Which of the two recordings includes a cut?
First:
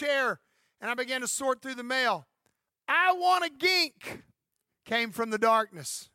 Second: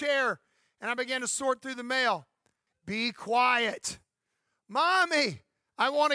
second; 1 cut; at 2.7 s

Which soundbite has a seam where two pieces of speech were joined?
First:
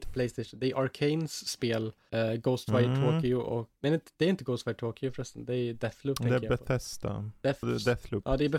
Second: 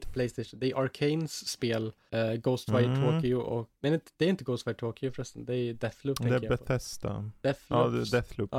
first; 1 cut; at 7.6 s

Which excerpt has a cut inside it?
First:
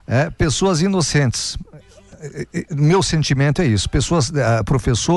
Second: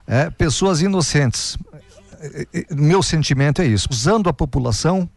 second; 1 cut; at 3.9 s

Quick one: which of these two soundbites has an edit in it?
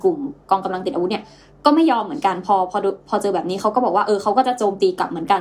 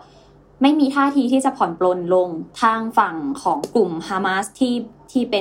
second; 1 cut; at 2.5 s

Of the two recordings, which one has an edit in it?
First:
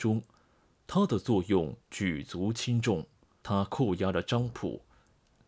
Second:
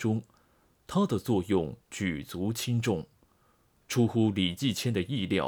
first; 1 cut; at 3.4 s

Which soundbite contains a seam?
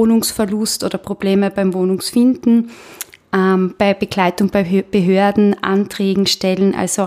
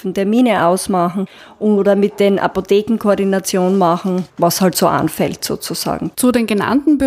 second; 2 cuts; at 4.3 s, 6.1 s

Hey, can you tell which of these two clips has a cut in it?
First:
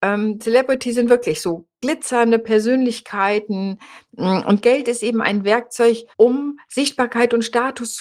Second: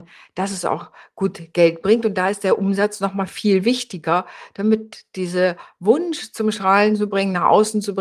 first; 1 cut; at 6.1 s

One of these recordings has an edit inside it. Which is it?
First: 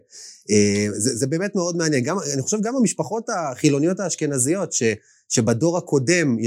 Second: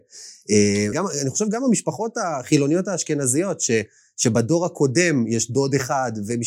second; 1 cut; at 0.9 s

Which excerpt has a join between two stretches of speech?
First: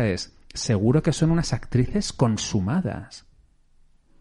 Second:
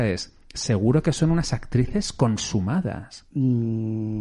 second; 1 cut; at 3.3 s

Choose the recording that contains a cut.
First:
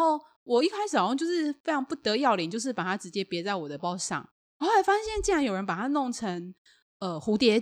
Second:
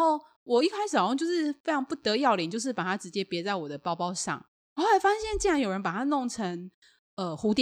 first; 1 cut; at 3.8 s

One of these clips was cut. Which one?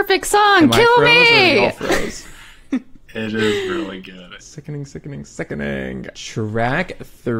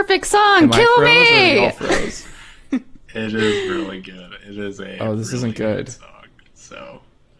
first; 2 cuts; at 4.4 s, 6.1 s

